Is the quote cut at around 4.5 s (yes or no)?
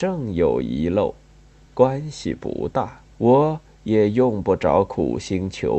no